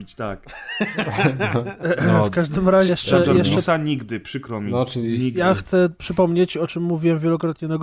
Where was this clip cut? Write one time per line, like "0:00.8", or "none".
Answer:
0:02.9